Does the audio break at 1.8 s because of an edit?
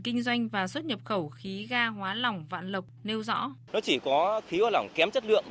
no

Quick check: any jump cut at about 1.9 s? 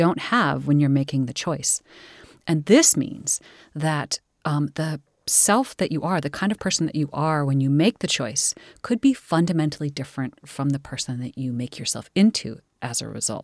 no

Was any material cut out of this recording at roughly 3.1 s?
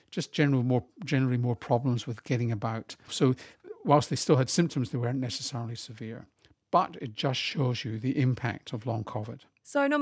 yes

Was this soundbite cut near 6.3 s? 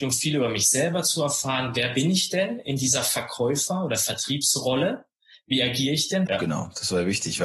yes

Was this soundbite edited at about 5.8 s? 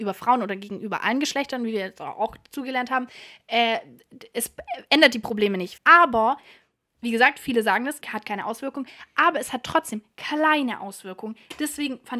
yes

